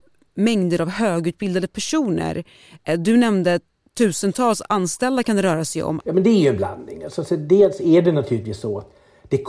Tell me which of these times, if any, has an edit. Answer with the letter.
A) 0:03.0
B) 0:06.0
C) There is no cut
B